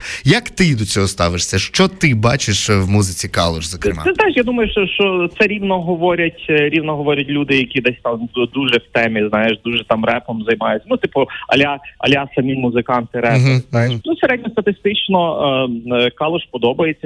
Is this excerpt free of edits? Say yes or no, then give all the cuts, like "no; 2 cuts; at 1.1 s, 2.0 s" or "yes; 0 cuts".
no; 1 cut; at 14.0 s